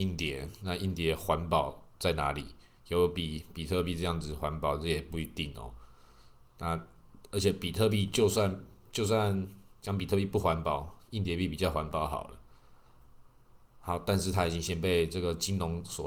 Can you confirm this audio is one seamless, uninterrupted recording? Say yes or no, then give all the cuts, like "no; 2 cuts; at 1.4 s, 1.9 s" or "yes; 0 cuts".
yes; 0 cuts